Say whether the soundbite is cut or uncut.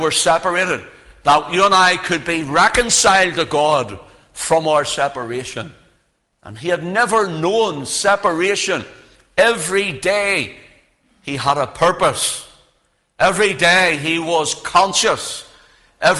uncut